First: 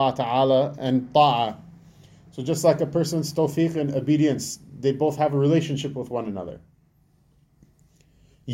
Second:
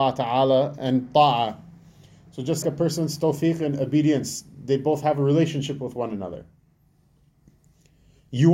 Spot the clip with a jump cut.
second; 1 cut; at 2.6 s

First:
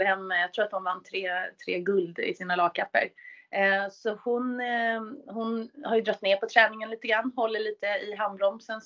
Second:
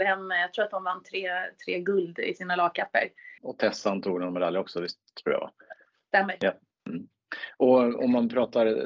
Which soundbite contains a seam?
second; 1 cut; at 3.4 s

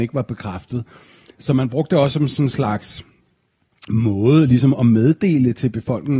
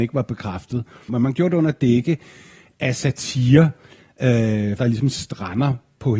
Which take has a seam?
second; 2 cuts; at 1.1 s, 4.8 s

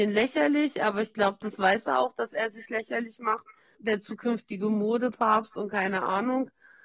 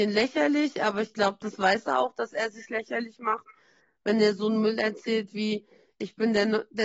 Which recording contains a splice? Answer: first; 1 cut; at 3.8 s

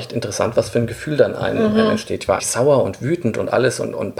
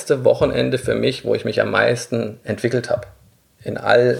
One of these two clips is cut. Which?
first; 1 cut; at 2.4 s

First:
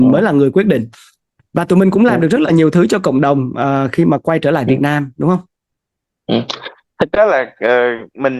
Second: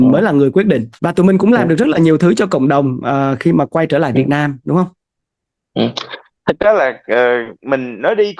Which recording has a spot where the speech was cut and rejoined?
second; 1 cut; at 1.0 s

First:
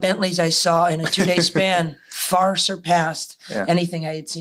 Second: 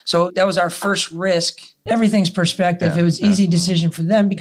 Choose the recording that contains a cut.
second; 1 cut; at 1.9 s

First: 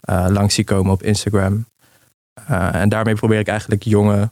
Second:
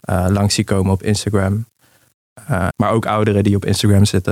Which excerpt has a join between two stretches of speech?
second; 1 cut; at 2.7 s

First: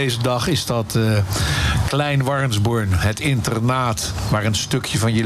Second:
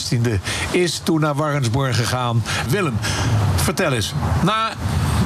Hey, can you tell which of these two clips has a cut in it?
second; 1 cut; at 2.7 s

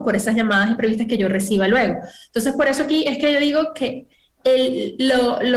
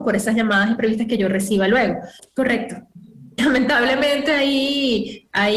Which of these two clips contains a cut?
second; 2 cuts; at 2.2 s, 3.4 s

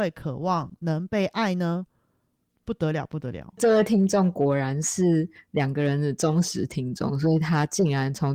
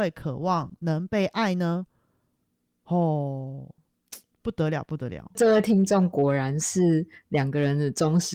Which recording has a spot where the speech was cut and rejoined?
first; 1 cut; at 2.5 s

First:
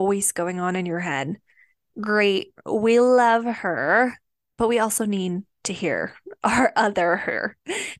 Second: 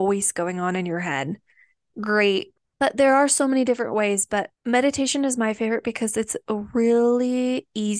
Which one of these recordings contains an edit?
second; 2 cuts; at 2.6 s, 4.5 s

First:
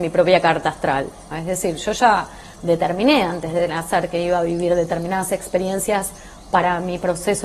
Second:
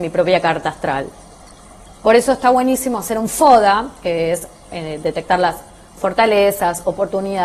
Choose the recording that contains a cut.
first; 1 cut; at 1.3 s

